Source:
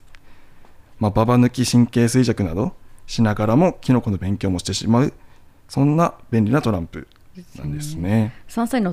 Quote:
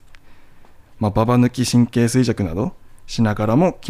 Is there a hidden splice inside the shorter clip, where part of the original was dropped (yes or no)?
no